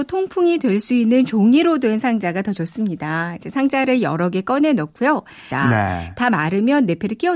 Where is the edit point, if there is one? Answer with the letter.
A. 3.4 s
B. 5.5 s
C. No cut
B